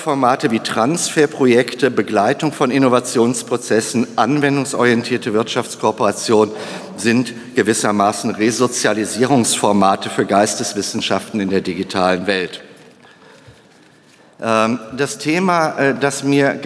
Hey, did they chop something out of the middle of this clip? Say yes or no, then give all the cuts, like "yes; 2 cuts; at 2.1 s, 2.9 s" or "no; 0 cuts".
no; 0 cuts